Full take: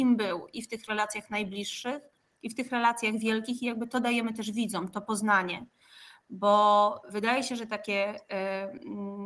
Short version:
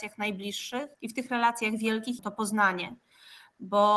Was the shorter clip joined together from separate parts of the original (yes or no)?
yes